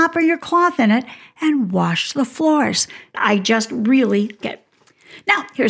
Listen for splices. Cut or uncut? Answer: cut